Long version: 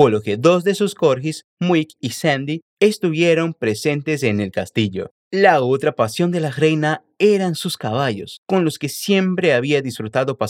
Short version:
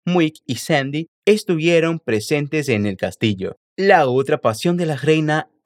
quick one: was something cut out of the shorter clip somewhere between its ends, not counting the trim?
no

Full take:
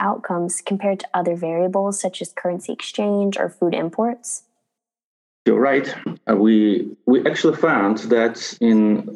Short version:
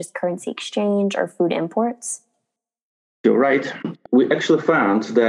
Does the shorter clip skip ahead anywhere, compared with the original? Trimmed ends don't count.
yes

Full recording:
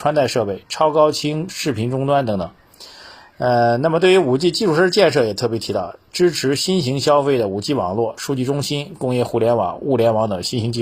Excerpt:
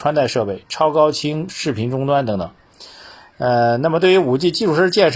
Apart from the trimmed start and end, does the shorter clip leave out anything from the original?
no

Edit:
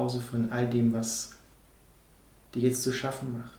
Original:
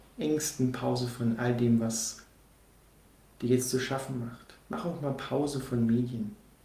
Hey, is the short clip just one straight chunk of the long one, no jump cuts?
yes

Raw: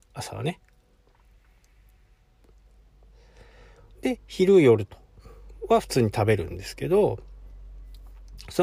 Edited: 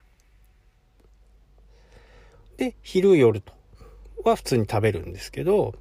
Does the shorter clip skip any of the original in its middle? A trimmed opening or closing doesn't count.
no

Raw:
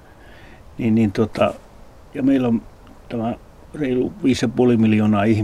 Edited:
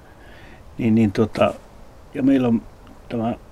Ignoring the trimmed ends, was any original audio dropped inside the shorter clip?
no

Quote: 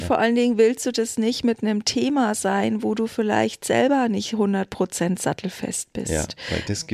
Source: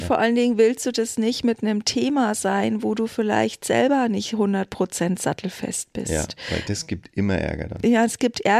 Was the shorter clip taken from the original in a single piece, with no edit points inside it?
yes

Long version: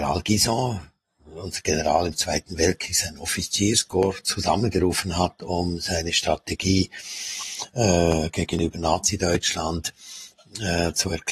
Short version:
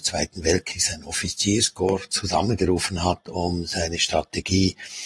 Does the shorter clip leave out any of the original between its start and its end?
no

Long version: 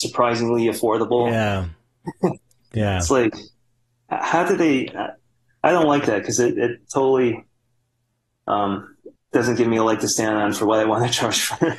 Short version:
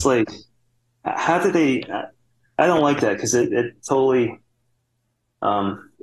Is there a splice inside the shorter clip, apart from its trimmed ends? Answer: no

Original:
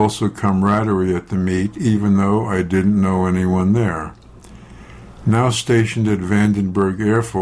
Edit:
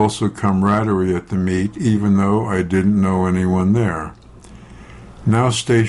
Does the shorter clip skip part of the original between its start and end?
no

